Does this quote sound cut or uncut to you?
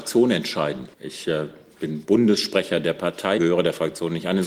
cut